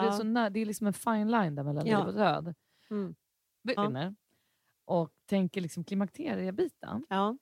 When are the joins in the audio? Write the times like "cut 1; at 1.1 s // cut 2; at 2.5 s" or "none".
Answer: cut 1; at 3.8 s